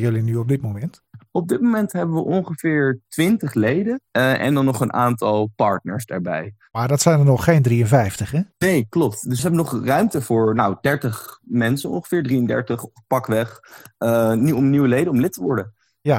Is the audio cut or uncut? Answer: cut